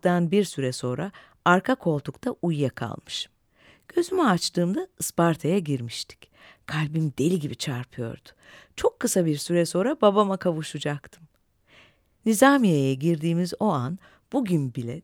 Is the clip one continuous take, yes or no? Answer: yes